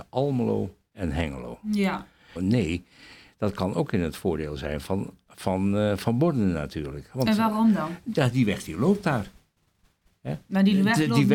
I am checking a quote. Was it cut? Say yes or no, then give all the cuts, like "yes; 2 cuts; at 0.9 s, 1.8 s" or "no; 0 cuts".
yes; 1 cut; at 2.4 s